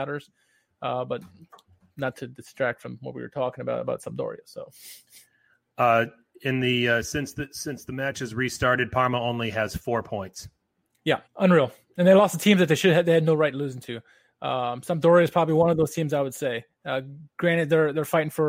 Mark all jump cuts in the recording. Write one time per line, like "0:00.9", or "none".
0:11.3